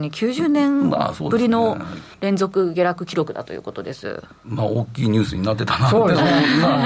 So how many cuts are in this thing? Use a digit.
1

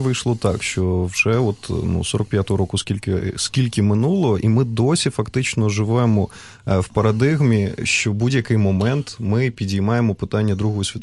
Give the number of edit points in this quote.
0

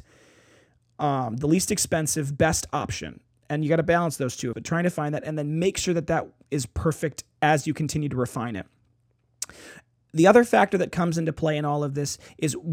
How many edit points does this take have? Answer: 1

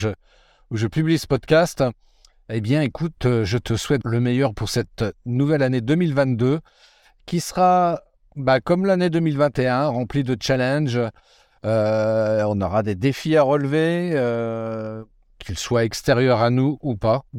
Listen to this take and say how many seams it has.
1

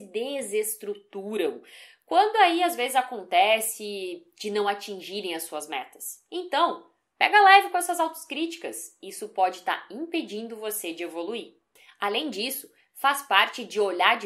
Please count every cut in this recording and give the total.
0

